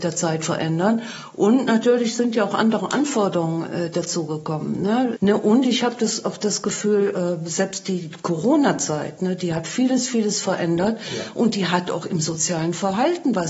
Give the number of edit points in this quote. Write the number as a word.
one